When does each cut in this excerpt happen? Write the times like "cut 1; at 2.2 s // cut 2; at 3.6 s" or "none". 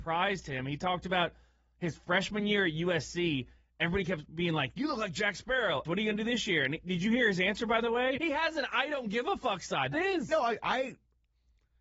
cut 1; at 5.8 s // cut 2; at 8.2 s // cut 3; at 9.9 s